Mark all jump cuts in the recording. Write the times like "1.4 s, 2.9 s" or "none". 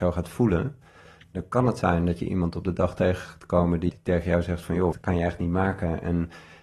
3.9 s, 4.9 s